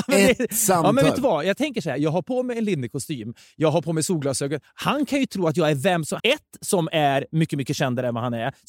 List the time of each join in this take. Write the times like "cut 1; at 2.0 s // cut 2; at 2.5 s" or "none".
cut 1; at 6.2 s